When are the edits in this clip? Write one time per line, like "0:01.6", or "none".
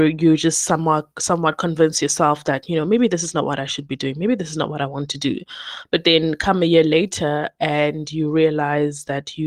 none